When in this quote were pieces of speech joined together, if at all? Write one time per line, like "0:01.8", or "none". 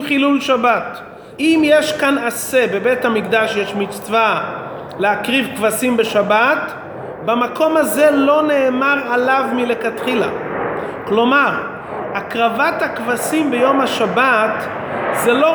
0:01.4